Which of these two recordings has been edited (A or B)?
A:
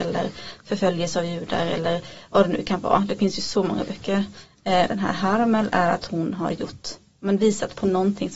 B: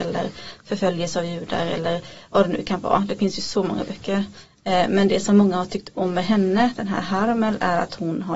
A